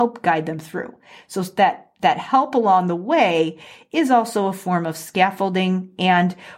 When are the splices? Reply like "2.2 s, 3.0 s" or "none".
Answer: none